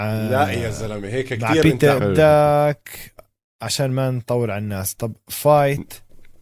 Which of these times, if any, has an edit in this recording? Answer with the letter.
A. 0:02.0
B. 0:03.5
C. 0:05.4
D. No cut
A